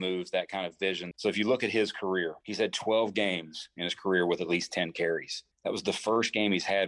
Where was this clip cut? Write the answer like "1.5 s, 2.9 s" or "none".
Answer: 1.1 s, 2.4 s, 5.5 s